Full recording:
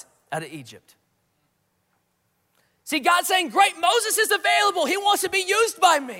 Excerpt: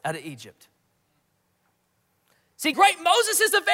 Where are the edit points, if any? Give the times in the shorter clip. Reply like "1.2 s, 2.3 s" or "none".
2.7 s